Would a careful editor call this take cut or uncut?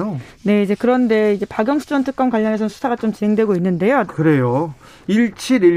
cut